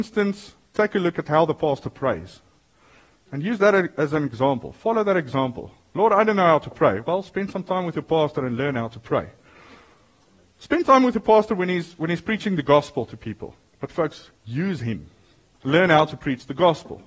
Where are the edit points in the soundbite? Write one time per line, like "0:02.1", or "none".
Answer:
0:13.7
0:15.6